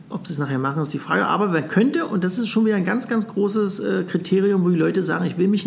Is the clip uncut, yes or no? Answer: yes